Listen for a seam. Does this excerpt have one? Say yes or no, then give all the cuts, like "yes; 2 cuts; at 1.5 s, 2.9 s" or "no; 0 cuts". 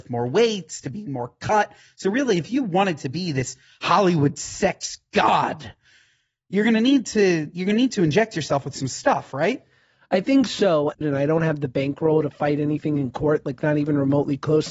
yes; 1 cut; at 11.0 s